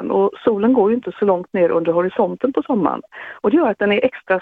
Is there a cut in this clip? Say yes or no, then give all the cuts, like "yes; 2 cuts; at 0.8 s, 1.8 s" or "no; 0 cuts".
yes; 1 cut; at 3.4 s